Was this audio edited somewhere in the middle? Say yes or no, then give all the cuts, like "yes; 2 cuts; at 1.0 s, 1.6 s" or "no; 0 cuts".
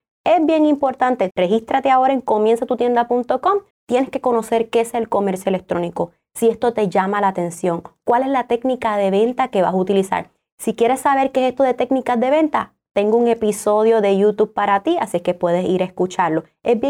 yes; 2 cuts; at 1.3 s, 3.7 s